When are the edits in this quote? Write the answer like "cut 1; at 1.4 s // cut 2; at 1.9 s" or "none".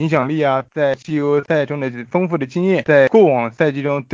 none